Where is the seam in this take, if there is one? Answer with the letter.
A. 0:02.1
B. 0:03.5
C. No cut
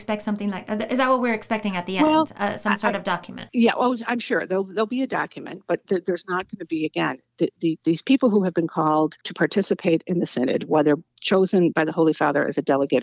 C